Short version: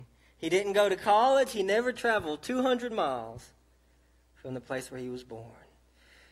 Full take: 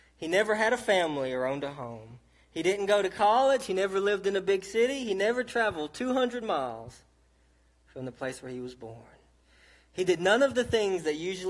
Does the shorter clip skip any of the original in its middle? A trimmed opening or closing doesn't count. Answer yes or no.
yes